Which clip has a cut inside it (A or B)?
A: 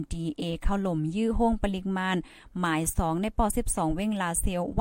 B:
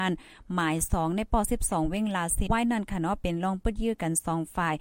B